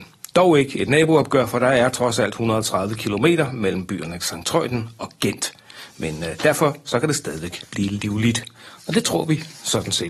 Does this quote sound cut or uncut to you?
uncut